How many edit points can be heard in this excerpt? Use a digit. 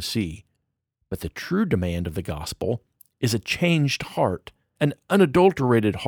2